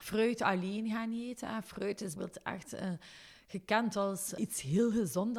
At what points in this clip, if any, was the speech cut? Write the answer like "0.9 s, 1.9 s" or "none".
2.2 s